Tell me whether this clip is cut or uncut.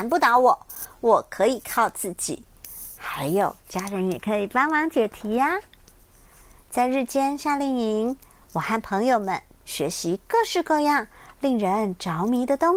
uncut